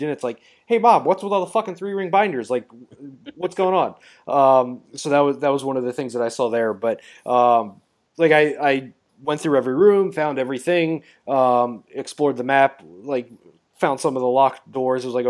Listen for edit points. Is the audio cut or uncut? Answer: uncut